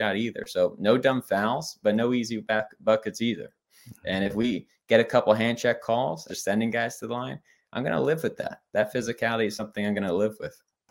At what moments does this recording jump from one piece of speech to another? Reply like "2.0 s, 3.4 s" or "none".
6.3 s

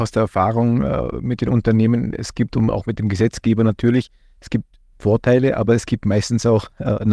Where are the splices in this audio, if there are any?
none

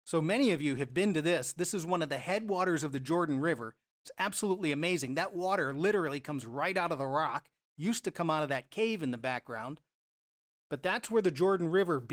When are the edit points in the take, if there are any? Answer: none

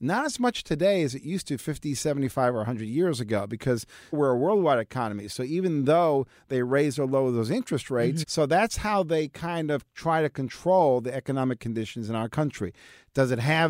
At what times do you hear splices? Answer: 4.1 s, 8.2 s

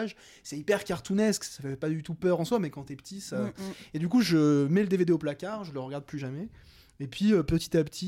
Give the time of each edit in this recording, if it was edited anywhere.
none

